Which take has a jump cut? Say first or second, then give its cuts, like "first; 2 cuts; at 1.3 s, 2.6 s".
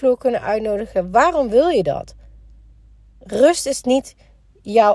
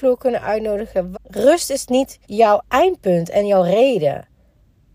second; 2 cuts; at 1.1 s, 2.2 s